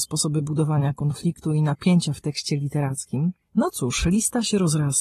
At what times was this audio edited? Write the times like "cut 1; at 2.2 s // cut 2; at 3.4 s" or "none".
cut 1; at 3.4 s